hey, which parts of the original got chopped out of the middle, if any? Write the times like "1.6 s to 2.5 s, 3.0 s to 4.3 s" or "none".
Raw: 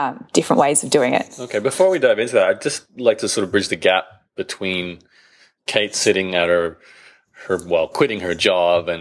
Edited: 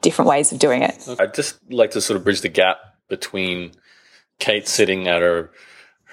1.5 s to 2.5 s